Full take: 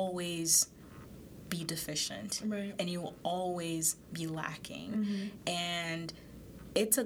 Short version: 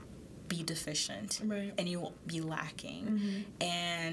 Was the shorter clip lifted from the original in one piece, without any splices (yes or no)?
no